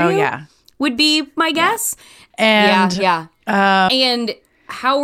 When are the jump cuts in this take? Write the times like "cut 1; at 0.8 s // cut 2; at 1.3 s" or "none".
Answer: cut 1; at 2.3 s // cut 2; at 3.9 s